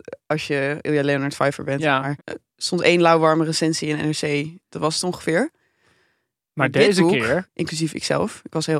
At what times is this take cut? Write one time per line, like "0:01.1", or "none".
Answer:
0:02.2
0:04.6
0:07.4